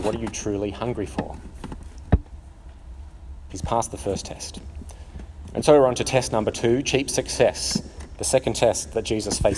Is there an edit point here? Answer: yes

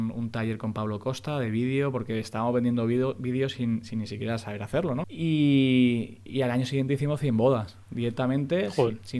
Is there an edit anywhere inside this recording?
yes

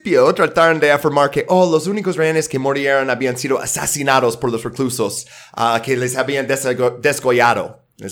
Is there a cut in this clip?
no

